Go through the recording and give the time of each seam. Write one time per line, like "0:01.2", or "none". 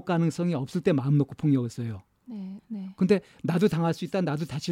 0:02.6

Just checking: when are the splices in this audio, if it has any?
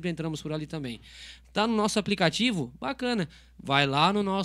none

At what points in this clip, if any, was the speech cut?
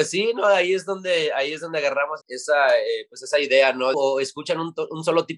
0:02.2
0:03.9

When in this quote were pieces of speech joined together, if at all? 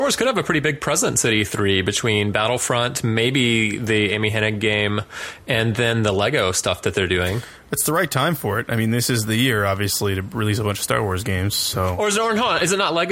none

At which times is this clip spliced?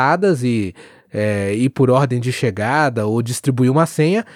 none

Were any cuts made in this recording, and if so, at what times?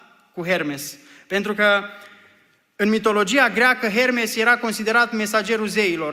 none

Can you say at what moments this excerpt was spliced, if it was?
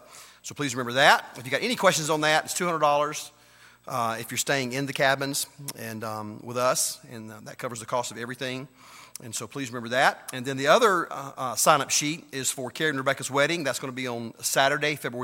none

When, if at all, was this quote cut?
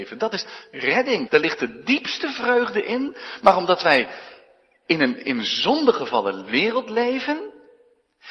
0:01.3

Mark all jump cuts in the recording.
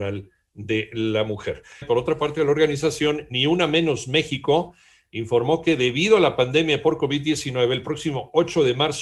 0:01.8

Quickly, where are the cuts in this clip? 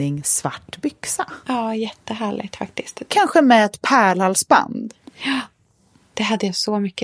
0:01.4
0:03.1

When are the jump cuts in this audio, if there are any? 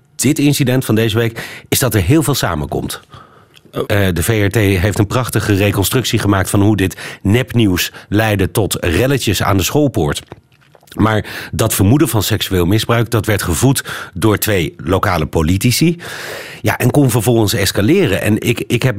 0:03.9

